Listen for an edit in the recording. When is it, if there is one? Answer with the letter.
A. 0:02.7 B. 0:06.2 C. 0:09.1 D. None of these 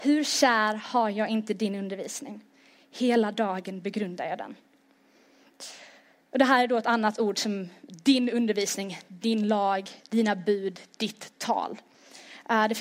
D